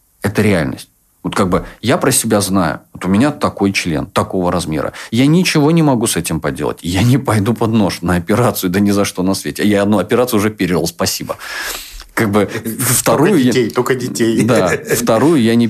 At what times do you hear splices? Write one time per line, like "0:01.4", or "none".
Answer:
none